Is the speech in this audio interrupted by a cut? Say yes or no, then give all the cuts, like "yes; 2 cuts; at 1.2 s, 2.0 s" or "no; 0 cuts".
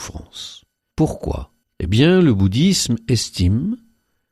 yes; 1 cut; at 0.9 s